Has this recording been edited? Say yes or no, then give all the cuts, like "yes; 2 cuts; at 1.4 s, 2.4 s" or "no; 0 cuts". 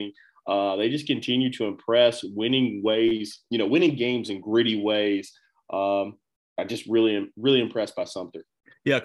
no; 0 cuts